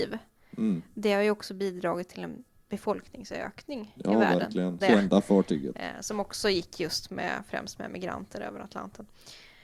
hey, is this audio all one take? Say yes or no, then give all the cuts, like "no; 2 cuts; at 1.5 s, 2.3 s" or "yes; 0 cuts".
no; 1 cut; at 4.8 s